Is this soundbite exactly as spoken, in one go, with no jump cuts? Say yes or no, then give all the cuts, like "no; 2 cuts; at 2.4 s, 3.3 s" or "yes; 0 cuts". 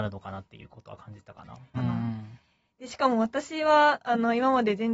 no; 1 cut; at 1.7 s